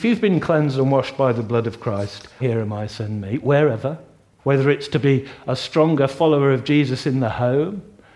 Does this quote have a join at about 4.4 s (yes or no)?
yes